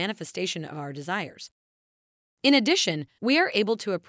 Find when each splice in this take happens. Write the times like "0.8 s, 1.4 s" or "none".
3.2 s